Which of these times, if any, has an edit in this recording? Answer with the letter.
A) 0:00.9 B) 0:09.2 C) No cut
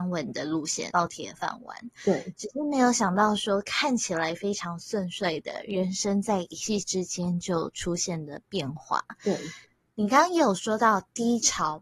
A